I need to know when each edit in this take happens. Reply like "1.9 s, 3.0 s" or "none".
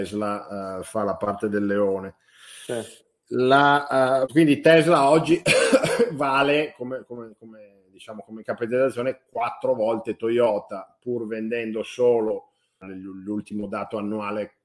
4.3 s, 12.8 s